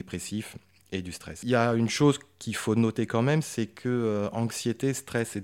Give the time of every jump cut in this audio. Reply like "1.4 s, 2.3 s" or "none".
none